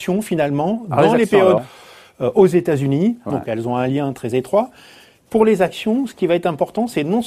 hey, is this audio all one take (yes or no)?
no